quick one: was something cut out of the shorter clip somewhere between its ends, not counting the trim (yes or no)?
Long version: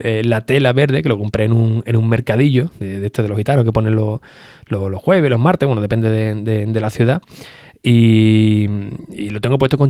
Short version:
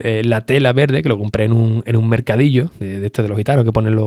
no